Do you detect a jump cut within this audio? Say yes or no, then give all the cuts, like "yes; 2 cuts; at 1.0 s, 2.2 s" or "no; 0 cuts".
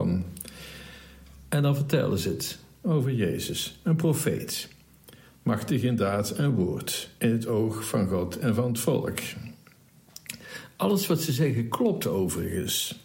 no; 0 cuts